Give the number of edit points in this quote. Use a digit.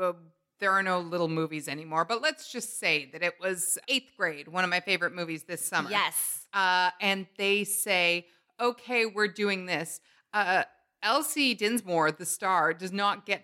1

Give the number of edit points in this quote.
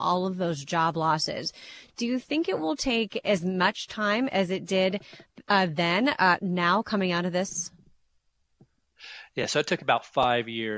0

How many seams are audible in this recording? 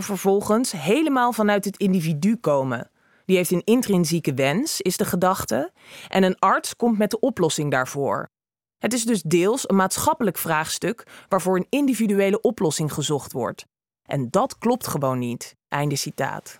1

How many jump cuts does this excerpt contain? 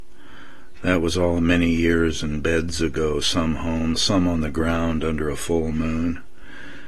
1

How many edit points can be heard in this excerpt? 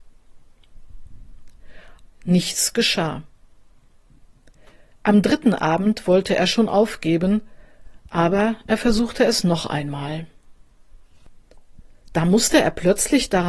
1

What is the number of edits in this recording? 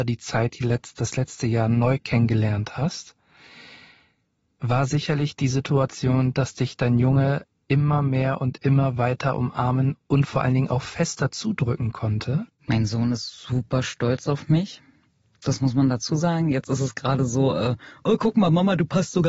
1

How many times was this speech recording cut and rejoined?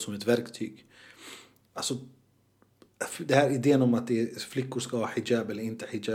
1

